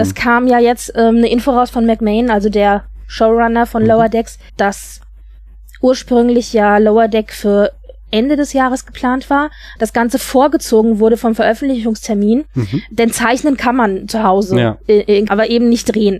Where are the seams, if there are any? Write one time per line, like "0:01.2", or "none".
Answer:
0:04.5
0:09.8
0:15.3